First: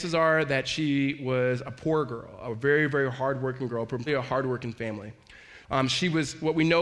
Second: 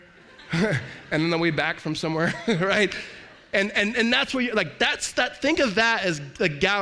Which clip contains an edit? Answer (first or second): first